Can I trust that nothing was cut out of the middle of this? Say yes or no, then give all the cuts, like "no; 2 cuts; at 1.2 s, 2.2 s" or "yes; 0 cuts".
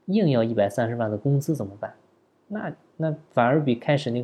yes; 0 cuts